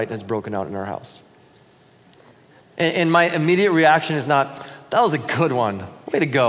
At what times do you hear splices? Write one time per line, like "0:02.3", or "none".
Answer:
0:02.6